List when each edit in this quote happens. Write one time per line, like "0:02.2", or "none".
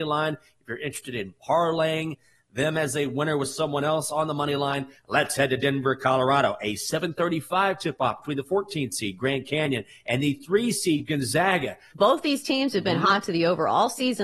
0:05.0
0:11.9